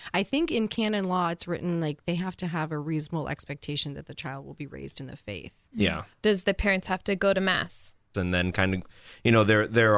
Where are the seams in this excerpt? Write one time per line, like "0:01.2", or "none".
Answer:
0:06.1
0:08.1